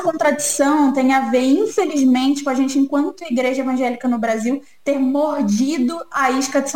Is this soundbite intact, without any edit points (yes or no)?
yes